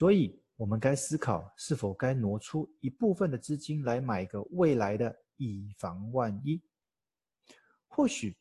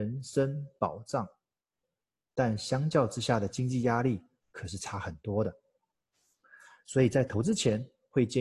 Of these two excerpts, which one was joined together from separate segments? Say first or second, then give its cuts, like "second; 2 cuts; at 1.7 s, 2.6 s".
second; 1 cut; at 2.3 s